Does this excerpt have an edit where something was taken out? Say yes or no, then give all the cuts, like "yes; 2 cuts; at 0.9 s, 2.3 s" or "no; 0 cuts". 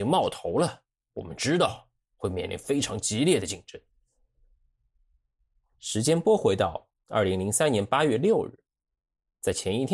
no; 0 cuts